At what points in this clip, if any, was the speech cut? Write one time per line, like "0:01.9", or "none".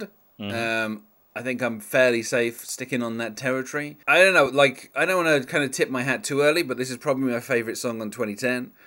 none